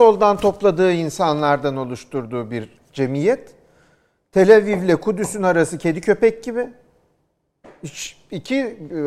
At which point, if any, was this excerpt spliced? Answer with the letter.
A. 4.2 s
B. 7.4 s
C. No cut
C